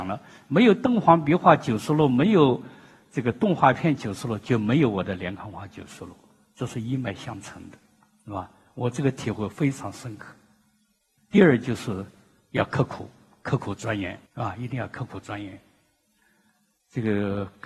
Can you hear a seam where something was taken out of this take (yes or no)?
yes